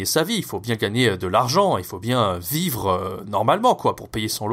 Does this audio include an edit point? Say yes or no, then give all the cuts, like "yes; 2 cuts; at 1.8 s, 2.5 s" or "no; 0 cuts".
no; 0 cuts